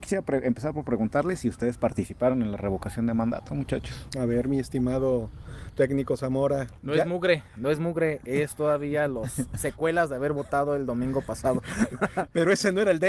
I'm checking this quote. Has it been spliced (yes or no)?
no